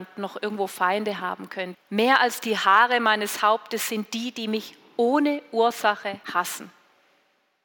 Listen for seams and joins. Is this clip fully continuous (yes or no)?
no